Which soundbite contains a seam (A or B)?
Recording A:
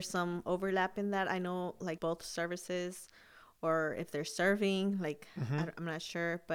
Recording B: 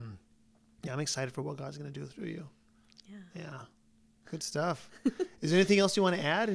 A